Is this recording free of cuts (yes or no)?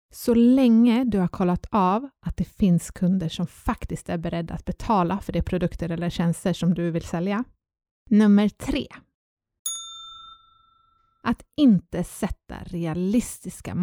no